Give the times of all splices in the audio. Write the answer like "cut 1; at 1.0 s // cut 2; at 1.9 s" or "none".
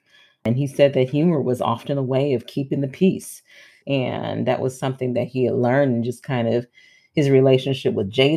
cut 1; at 3.8 s